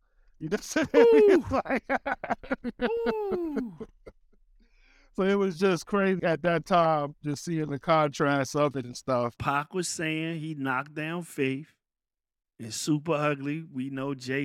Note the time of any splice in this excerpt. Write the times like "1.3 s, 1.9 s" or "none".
6.2 s, 9.4 s